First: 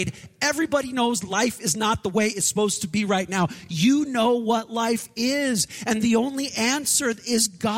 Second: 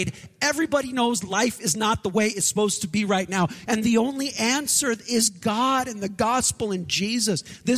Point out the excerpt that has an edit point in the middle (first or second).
second